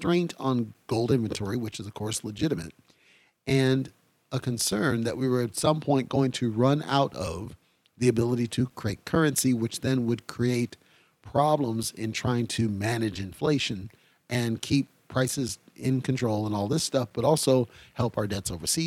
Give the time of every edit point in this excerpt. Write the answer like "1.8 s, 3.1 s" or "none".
none

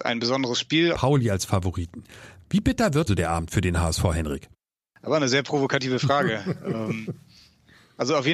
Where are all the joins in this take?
0.9 s, 3.1 s

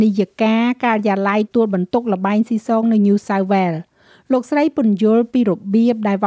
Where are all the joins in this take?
1.5 s

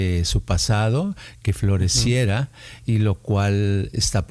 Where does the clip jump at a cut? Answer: none

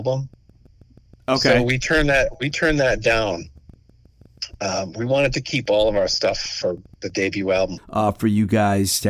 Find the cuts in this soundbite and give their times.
7.8 s

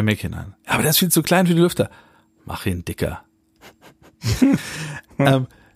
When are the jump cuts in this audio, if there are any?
3.6 s

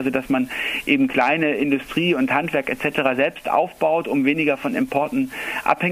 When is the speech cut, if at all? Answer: none

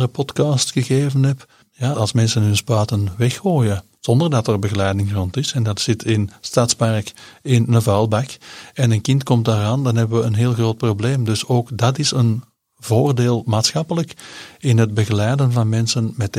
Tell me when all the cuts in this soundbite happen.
1.9 s

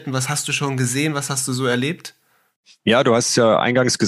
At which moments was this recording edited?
none

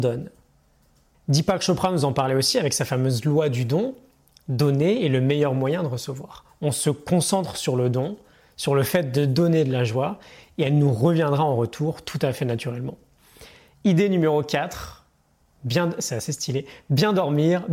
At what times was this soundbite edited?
none

